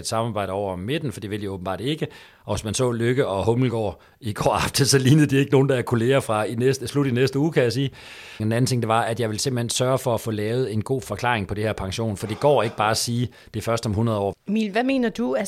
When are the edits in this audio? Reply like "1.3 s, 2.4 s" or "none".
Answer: 8.4 s, 14.3 s